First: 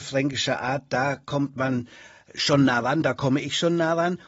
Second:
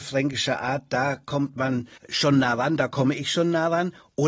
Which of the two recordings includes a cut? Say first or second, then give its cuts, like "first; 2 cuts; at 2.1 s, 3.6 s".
second; 1 cut; at 2.0 s